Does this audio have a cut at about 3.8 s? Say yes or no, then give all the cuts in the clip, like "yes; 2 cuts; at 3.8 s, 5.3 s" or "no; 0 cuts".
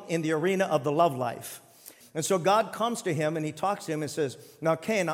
no; 1 cut; at 2.0 s